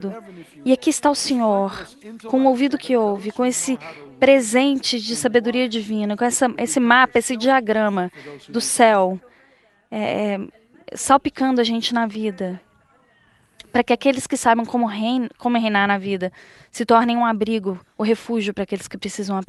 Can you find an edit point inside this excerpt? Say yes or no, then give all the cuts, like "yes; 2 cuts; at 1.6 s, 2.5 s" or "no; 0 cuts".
no; 0 cuts